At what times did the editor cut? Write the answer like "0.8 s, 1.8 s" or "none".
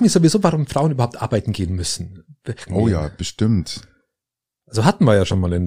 2.7 s